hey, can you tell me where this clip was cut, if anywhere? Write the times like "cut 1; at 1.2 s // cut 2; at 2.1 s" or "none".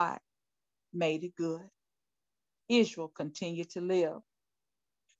cut 1; at 2.6 s